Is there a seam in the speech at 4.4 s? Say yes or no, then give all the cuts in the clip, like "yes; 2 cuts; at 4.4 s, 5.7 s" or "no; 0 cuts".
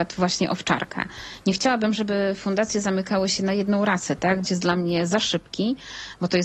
yes; 1 cut; at 4.4 s